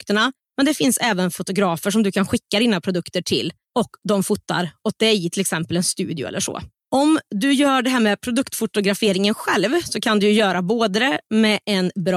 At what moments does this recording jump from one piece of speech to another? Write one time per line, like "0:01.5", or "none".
0:06.8

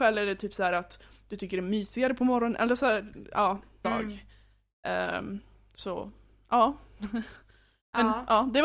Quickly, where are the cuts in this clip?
0:03.8

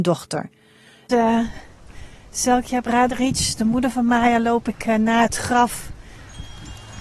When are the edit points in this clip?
0:01.1

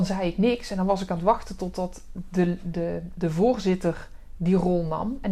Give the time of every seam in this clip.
none

